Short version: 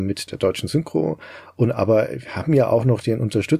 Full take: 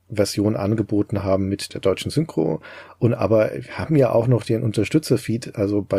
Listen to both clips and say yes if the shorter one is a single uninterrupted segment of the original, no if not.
yes